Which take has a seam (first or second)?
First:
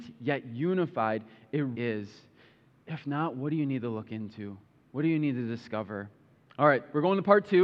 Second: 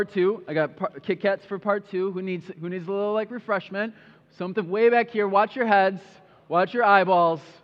first